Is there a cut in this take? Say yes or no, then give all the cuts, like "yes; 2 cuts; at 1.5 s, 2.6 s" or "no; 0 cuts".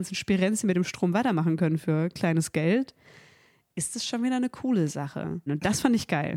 yes; 1 cut; at 5.5 s